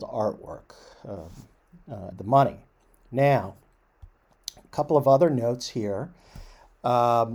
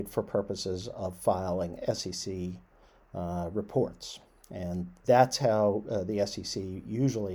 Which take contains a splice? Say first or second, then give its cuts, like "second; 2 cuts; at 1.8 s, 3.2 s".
first; 1 cut; at 2.1 s